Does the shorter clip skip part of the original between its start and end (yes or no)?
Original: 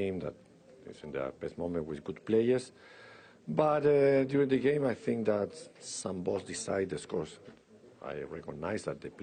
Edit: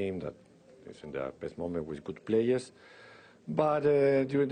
no